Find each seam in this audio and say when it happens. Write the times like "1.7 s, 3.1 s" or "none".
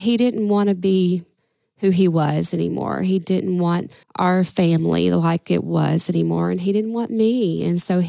4.0 s